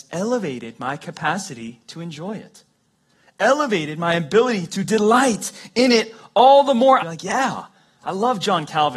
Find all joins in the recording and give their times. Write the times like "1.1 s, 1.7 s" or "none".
7.0 s